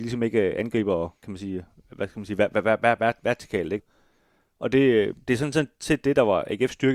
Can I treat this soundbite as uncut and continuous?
no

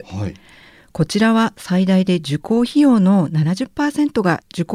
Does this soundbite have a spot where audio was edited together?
no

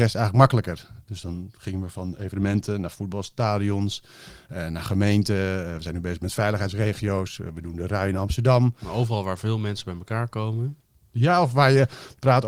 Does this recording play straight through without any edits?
yes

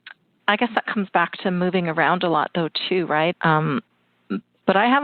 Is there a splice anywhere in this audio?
yes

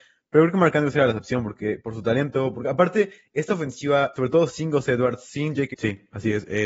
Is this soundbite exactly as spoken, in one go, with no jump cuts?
no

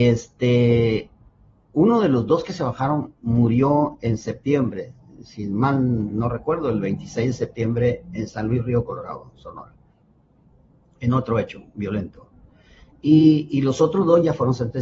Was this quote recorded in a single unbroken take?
yes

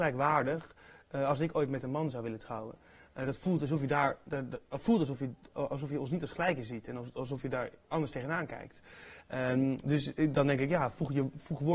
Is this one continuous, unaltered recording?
yes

